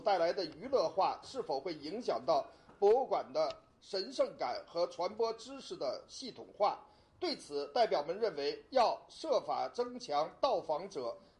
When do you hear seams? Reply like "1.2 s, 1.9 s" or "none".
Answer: 1.2 s